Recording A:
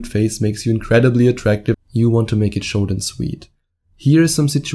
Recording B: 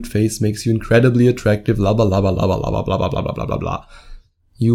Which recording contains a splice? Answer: A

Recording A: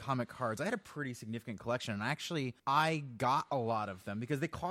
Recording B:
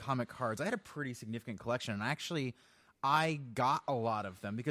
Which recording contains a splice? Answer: A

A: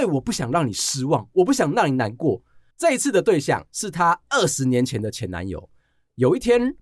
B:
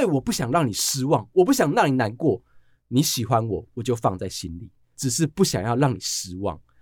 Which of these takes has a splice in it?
A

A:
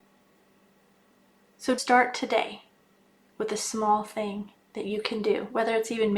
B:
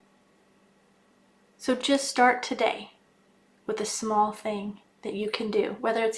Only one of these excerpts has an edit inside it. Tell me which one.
A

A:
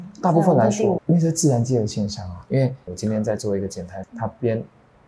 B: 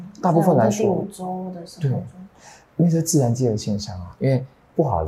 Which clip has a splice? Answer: A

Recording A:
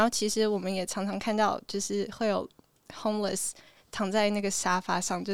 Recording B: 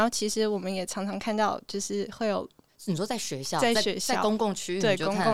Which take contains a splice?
B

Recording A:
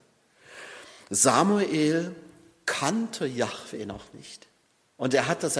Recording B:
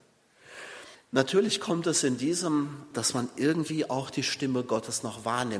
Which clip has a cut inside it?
B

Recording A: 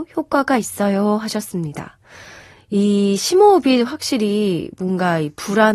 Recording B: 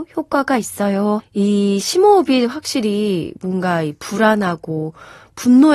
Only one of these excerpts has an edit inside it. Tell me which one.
B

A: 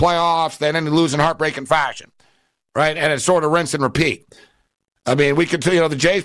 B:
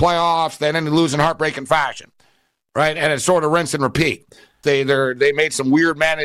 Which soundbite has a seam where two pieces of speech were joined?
B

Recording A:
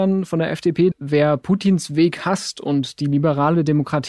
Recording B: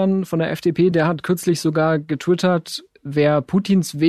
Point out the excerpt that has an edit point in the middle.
A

